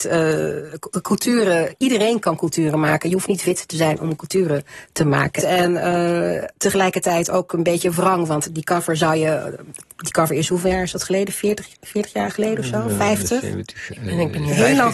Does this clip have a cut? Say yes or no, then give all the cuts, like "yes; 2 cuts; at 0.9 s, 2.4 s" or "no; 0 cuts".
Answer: yes; 1 cut; at 5.4 s